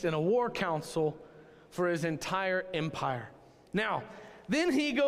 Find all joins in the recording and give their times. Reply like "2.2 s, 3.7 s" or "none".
none